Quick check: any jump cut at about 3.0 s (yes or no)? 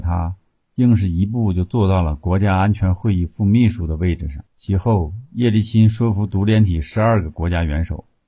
no